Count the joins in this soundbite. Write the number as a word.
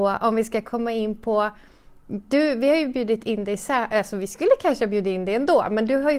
one